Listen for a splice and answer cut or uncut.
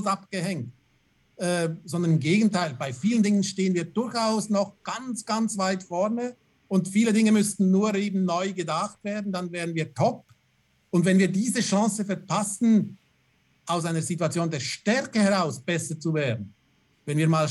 uncut